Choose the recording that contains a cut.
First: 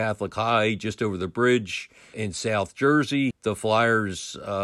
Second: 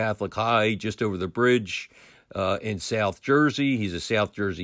first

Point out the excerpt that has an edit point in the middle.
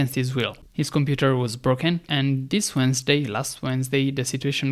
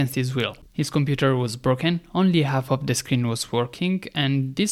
first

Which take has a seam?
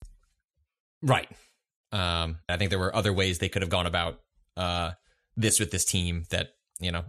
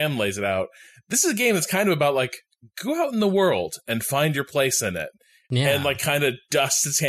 first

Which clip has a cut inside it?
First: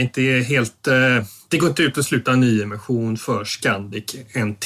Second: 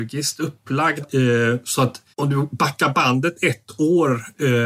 second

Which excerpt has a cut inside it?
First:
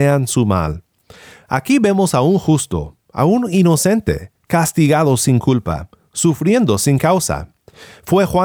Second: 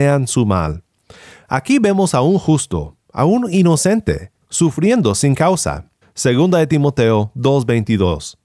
second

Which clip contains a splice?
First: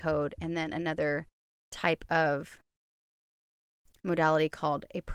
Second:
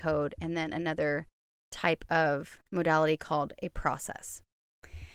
second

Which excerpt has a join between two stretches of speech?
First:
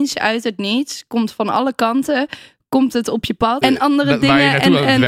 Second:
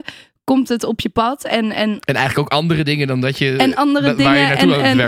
first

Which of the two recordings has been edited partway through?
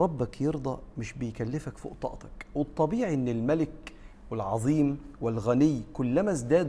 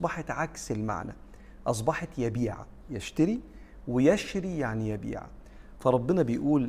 second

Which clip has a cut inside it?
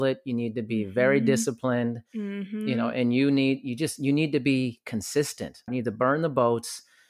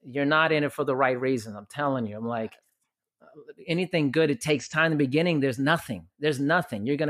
first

